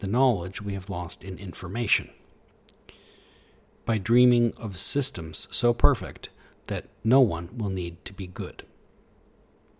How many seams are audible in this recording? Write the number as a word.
zero